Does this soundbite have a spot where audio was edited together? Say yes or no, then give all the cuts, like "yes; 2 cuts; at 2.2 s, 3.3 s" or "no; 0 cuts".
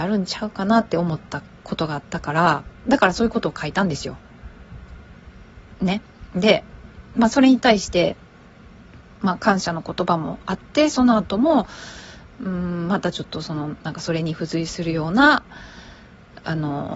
no; 0 cuts